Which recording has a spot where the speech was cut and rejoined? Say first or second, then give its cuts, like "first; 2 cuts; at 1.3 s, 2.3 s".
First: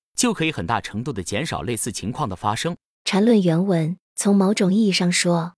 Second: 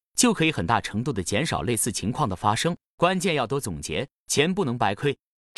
first; 2 cuts; at 2.9 s, 4.0 s